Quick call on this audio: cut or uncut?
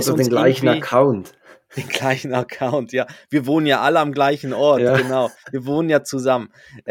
uncut